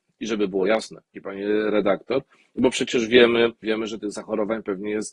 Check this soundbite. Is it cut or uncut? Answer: cut